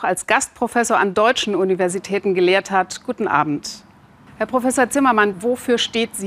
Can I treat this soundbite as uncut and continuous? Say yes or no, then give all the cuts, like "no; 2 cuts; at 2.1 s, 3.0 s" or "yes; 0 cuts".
no; 2 cuts; at 4.3 s, 5.3 s